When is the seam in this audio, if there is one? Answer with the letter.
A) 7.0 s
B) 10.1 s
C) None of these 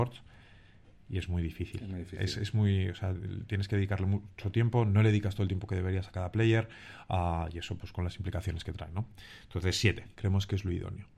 B